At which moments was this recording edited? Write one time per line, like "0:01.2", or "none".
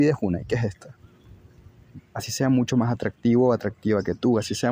0:02.0